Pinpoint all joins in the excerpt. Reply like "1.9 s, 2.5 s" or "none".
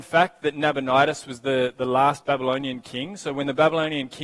none